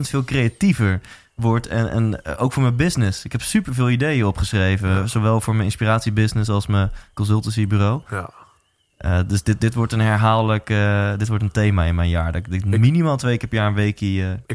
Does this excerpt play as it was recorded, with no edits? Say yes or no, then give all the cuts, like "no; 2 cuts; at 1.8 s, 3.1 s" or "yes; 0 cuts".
yes; 0 cuts